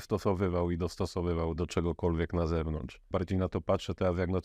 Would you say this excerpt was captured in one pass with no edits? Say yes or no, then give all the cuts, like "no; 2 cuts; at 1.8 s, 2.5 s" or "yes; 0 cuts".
no; 2 cuts; at 1.6 s, 3.1 s